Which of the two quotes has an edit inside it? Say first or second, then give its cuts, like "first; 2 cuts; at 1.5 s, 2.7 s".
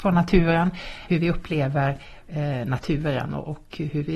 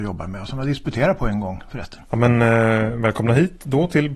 first; 1 cut; at 1.1 s